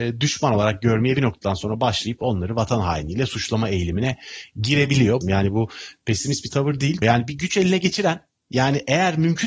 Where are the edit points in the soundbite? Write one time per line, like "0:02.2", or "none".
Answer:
0:05.2
0:07.0

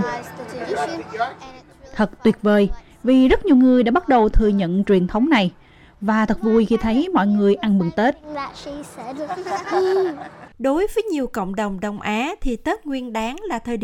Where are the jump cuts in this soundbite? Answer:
0:10.5

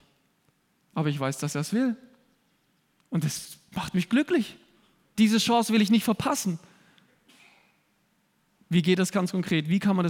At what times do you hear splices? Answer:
0:05.1

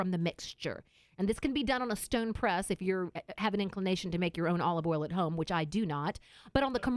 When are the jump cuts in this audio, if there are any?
none

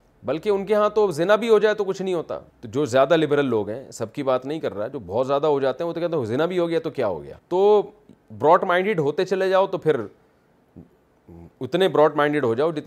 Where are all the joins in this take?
0:02.5
0:07.4

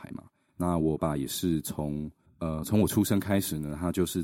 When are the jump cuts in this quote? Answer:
0:01.0

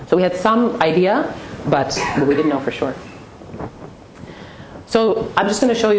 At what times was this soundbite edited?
none

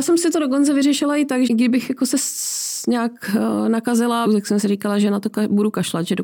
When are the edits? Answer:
0:01.5
0:04.3

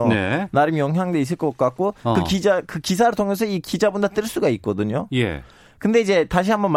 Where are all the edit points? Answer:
none

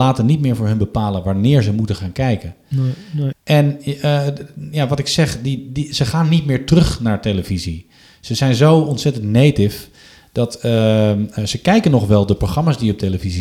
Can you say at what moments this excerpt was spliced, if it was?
0:03.3

